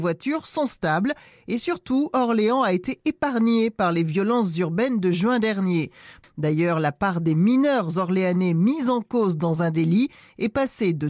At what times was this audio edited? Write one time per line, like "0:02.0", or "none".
0:06.2